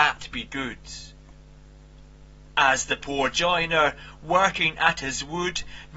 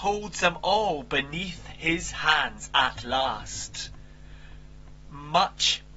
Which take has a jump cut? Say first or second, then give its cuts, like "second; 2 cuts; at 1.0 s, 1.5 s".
first; 1 cut; at 2.5 s